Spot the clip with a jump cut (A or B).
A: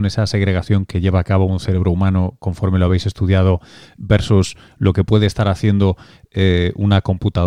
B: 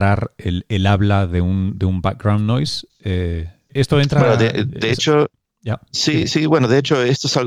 B